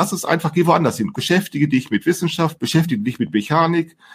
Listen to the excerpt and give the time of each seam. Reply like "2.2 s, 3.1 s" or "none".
1.1 s, 2.6 s